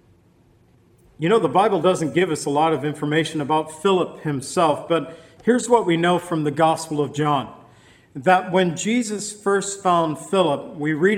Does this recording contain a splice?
no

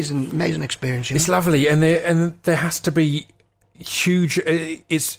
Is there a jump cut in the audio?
no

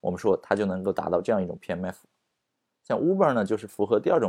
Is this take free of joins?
yes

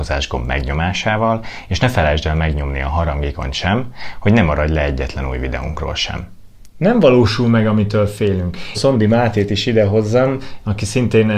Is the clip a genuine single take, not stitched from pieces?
no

